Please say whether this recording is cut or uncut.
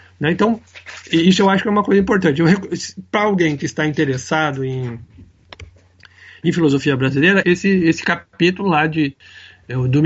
cut